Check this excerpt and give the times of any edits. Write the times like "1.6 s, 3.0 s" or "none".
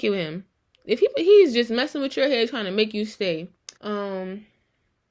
3.8 s